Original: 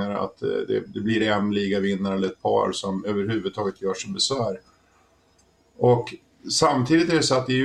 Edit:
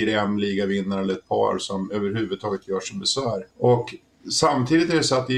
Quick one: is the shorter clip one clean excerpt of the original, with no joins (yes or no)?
no